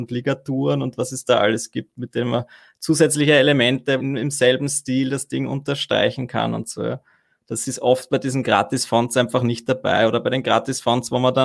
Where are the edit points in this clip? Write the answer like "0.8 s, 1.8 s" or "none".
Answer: 4.0 s